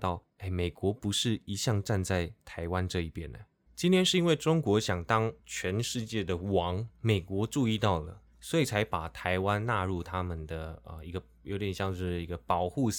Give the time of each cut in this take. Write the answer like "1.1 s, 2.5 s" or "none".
3.7 s